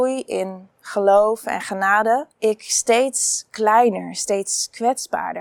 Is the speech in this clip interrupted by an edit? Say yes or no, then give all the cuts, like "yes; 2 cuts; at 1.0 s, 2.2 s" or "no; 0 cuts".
yes; 1 cut; at 2.3 s